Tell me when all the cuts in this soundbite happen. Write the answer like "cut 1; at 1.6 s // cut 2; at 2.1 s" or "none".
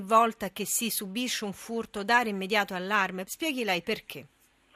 cut 1; at 3.3 s